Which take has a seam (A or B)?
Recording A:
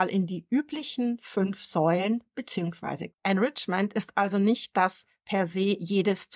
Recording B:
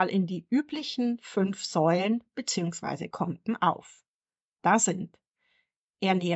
A